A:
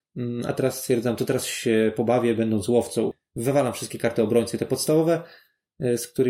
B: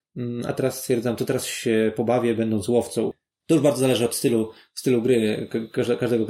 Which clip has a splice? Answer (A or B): B